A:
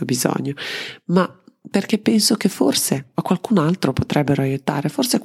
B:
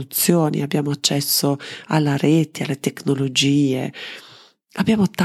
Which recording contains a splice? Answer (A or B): B